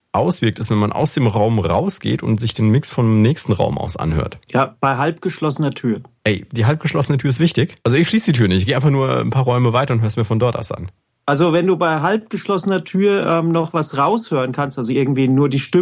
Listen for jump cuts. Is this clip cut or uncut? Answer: uncut